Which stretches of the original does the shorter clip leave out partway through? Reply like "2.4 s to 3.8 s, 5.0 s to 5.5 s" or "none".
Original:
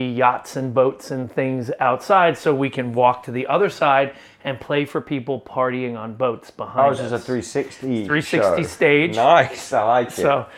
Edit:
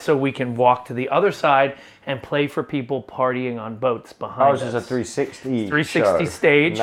none